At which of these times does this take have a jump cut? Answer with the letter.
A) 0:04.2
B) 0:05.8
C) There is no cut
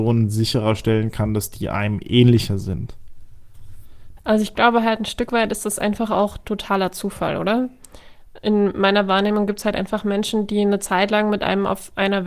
A